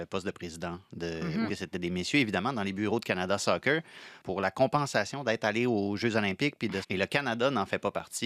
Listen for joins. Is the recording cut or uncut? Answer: cut